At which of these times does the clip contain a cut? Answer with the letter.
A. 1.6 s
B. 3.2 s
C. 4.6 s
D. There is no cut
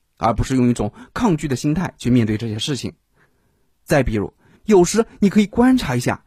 C